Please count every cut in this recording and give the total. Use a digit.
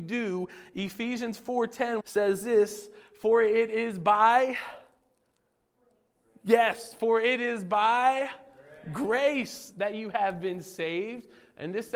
1